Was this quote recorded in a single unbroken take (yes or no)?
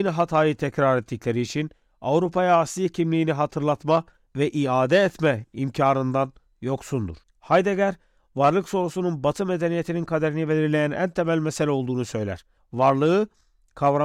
no